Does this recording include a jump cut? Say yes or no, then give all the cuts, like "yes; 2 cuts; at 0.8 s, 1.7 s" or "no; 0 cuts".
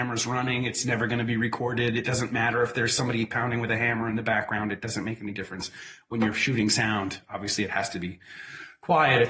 no; 0 cuts